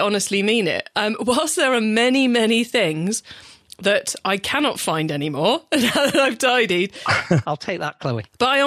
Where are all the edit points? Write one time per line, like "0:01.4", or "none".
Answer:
0:00.9
0:07.4